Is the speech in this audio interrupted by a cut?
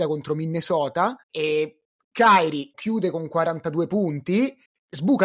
yes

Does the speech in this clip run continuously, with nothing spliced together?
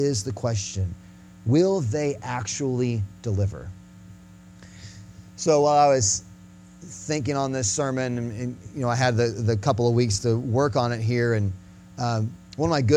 yes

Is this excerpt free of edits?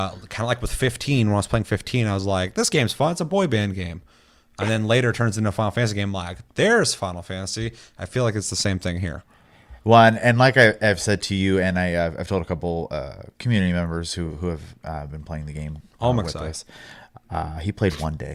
yes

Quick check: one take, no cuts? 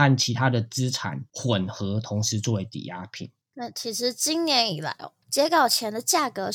no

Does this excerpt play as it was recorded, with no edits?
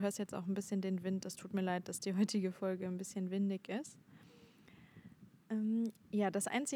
yes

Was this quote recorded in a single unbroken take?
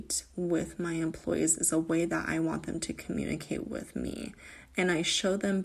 yes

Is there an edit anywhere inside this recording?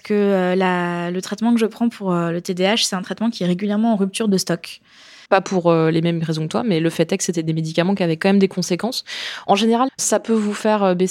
yes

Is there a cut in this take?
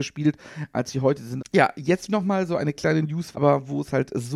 yes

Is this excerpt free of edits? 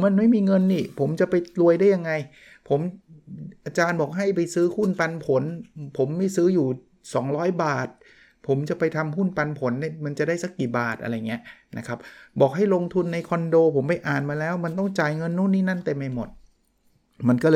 yes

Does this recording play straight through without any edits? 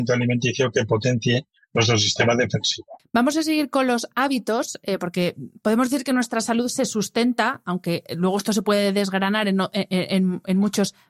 no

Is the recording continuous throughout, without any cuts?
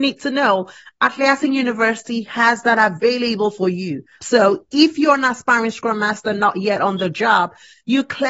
no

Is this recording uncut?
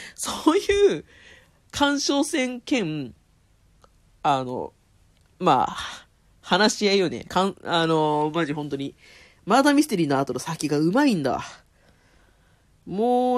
yes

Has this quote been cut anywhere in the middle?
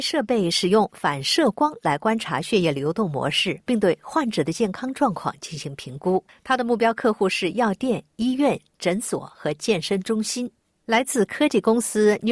no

